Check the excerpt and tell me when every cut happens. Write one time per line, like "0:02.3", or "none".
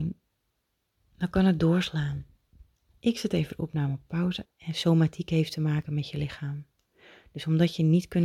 0:02.9
0:04.4